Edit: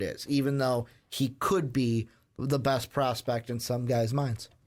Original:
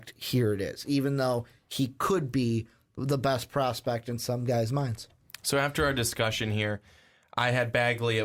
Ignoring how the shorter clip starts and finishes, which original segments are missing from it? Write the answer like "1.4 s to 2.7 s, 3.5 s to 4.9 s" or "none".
none